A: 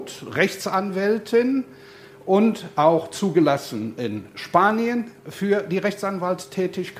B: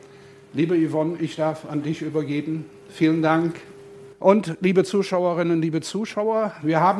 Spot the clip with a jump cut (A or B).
B